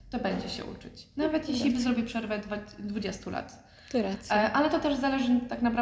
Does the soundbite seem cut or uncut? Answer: uncut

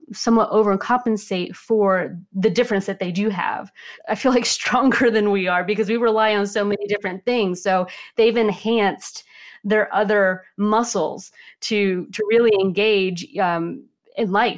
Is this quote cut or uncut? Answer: cut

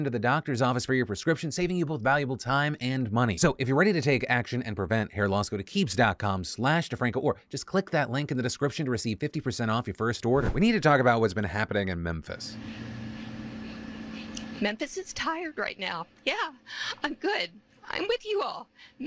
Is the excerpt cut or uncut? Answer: uncut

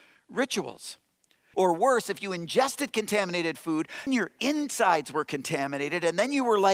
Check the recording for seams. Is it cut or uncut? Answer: cut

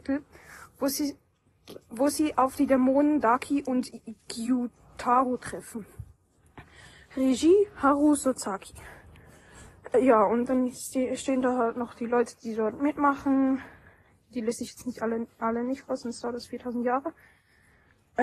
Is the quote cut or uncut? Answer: uncut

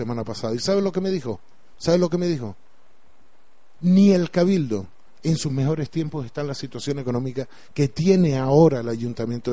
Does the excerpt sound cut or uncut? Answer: uncut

